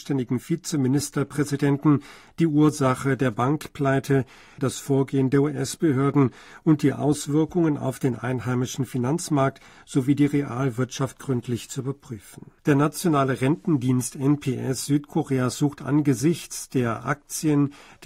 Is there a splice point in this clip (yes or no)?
yes